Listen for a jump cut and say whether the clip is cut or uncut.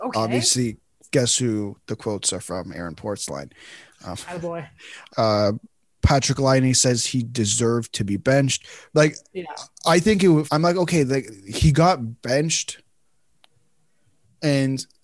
cut